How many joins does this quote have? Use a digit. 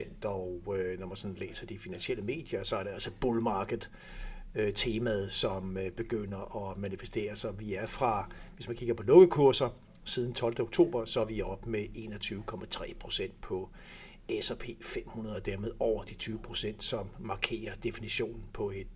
0